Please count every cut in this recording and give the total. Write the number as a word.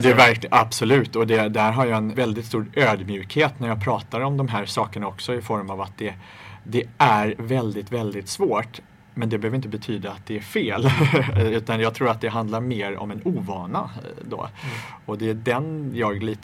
one